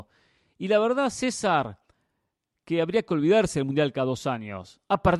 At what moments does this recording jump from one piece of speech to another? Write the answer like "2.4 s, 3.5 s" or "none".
none